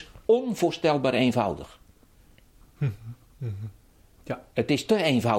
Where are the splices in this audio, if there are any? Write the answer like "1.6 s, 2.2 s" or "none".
2.8 s